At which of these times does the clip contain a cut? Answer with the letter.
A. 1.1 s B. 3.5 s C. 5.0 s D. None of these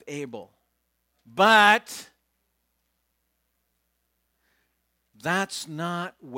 A